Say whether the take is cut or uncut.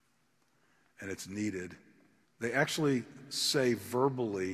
cut